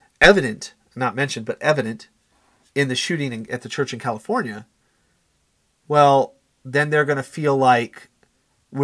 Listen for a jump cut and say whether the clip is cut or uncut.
uncut